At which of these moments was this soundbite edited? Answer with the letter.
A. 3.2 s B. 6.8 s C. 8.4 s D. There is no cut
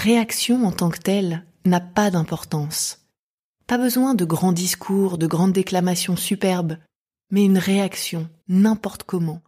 C